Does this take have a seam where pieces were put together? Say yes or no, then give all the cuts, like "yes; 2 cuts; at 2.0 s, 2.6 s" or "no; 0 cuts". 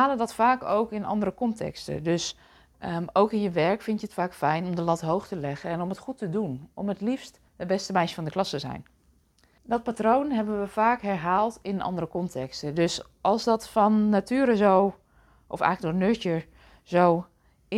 yes; 2 cuts; at 7.5 s, 9.6 s